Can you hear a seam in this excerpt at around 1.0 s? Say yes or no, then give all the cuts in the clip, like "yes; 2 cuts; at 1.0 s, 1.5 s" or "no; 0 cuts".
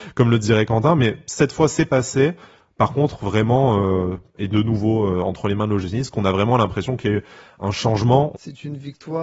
no; 2 cuts; at 4.3 s, 8.3 s